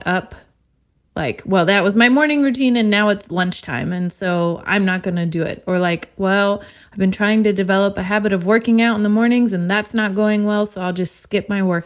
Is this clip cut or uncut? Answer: uncut